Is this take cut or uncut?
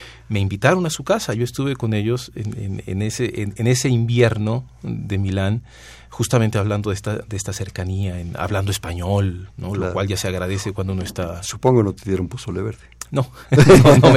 uncut